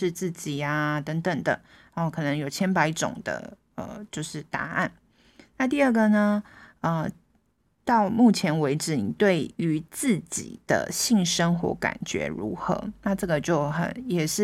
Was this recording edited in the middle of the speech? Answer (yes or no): no